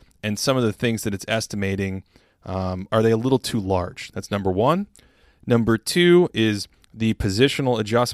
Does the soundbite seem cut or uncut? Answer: cut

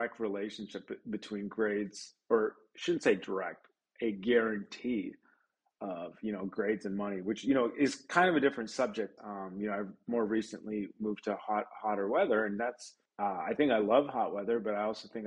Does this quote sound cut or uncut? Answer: cut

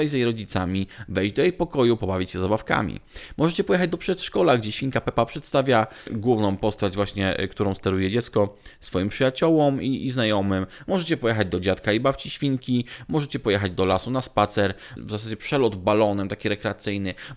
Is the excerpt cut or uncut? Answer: cut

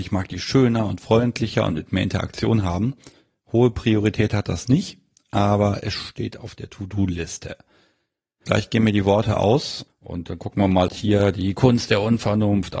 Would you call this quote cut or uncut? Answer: cut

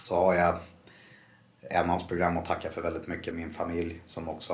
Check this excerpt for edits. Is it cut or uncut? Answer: cut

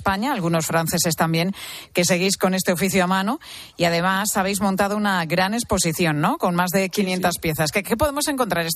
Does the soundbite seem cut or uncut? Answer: uncut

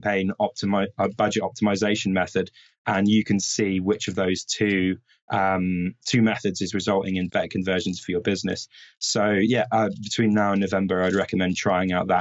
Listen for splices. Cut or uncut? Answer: cut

